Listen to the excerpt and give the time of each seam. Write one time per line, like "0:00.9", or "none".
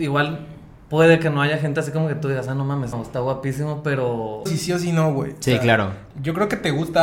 0:02.9
0:04.5